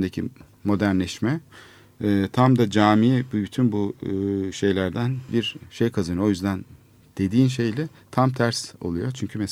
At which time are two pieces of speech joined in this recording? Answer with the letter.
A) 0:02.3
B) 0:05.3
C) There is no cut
B